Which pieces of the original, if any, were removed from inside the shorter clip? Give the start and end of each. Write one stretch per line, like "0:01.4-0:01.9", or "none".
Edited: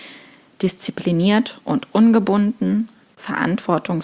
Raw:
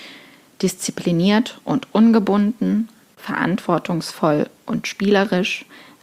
none